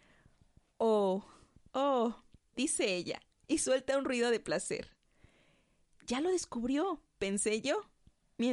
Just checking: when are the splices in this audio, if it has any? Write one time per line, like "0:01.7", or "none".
none